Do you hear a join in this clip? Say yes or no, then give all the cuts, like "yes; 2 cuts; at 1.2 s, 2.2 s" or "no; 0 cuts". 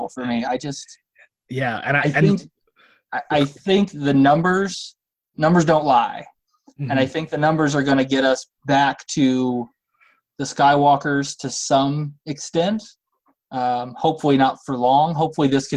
no; 0 cuts